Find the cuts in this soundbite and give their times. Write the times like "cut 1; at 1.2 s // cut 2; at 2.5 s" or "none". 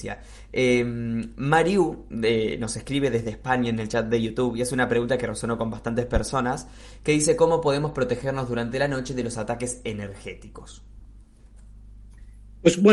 none